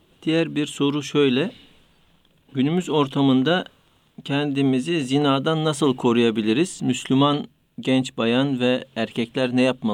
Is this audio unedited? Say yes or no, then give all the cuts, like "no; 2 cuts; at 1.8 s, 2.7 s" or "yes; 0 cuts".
yes; 0 cuts